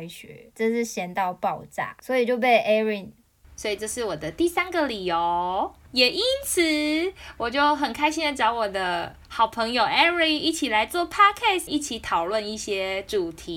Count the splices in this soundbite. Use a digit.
2